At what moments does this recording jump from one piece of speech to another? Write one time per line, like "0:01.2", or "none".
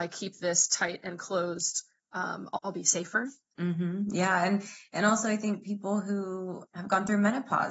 0:03.5
0:06.6